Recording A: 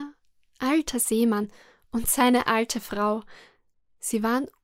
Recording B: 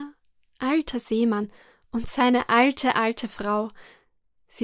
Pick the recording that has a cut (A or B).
A